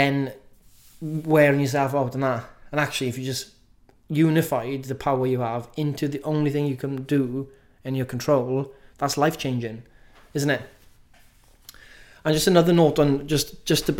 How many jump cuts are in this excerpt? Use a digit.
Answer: 0